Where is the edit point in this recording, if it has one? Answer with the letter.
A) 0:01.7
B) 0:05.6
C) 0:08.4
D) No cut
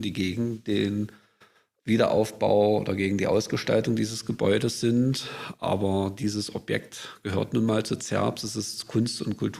D